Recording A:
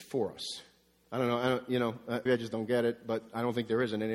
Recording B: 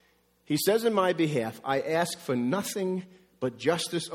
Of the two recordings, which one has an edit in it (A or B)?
A